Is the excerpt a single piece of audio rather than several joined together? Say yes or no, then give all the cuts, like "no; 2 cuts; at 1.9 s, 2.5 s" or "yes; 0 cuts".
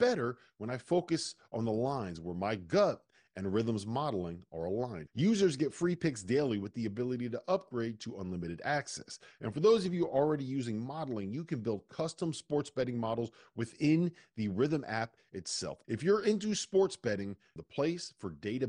no; 3 cuts; at 5.1 s, 15.8 s, 17.6 s